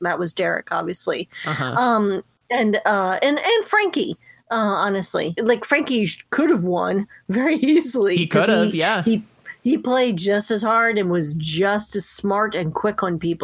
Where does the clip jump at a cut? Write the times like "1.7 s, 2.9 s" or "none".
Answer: 5.4 s